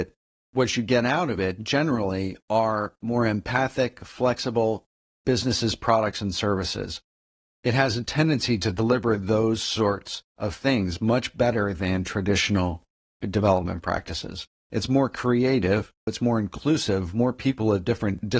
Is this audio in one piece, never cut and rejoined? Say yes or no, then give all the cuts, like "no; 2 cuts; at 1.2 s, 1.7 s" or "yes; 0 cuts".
no; 1 cut; at 16.1 s